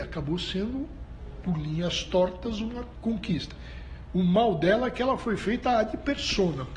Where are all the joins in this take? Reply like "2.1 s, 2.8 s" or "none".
none